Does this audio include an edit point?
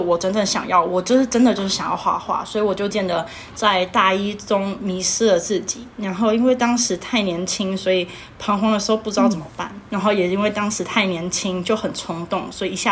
yes; 1 cut; at 2.9 s

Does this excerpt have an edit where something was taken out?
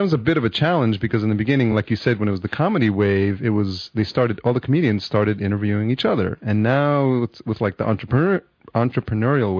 no; 0 cuts

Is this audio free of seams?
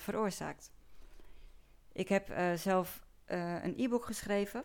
yes; 0 cuts

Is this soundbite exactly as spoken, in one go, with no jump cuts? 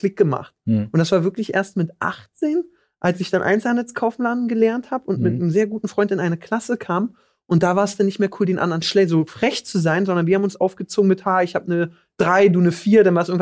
yes; 0 cuts

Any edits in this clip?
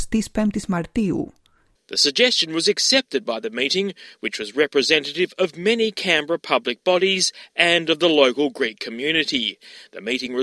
yes; 1 cut; at 1.7 s

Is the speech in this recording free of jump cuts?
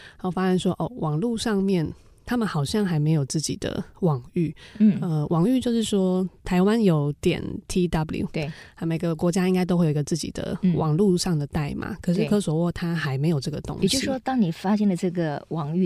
yes; 0 cuts

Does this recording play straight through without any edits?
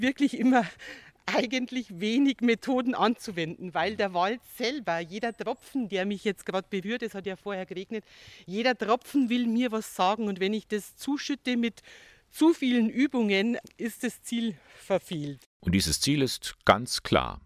yes; 0 cuts

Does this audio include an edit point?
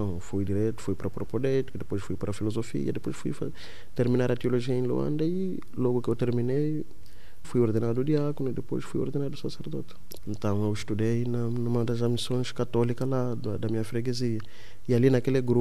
yes; 2 cuts; at 7.4 s, 10.2 s

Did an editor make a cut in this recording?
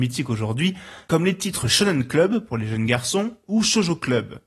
no; 0 cuts

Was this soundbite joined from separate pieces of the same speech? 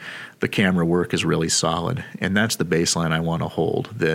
no; 0 cuts

